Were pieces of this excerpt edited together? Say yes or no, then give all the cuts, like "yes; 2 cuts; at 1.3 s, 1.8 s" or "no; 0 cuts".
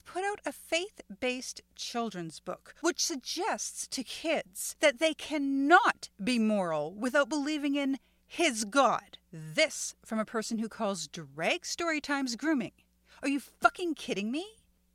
yes; 1 cut; at 9.2 s